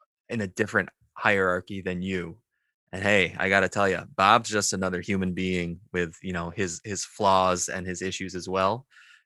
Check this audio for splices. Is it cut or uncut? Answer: uncut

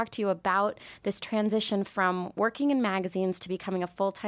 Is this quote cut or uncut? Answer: uncut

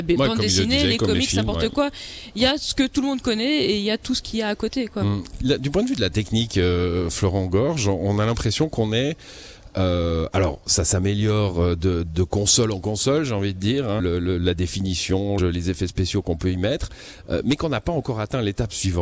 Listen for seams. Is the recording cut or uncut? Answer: cut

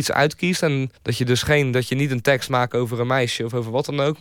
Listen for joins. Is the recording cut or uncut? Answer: cut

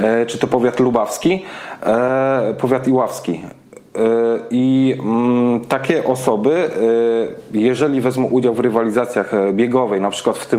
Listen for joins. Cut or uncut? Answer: uncut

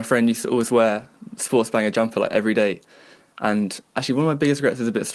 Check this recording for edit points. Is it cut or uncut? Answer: uncut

